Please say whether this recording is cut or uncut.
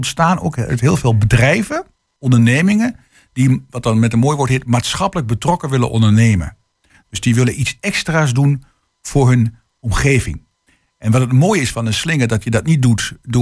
uncut